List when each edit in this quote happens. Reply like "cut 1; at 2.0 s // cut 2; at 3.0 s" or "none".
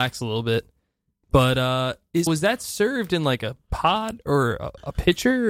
cut 1; at 2.3 s